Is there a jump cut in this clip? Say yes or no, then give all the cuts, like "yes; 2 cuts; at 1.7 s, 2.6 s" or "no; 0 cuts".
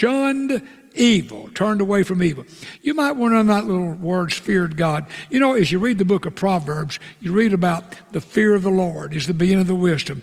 no; 0 cuts